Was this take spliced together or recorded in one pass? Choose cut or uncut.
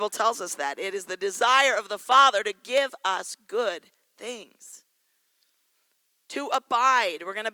uncut